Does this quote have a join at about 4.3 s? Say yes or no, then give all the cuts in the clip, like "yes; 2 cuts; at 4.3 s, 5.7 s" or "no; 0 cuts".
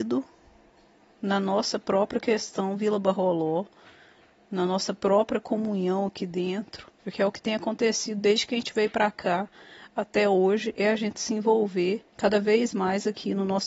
no; 2 cuts; at 7.0 s, 12.1 s